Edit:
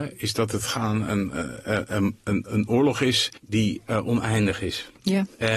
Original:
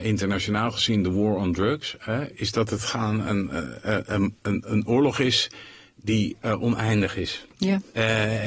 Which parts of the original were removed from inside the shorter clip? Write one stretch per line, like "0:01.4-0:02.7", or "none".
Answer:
0:05.6-0:05.9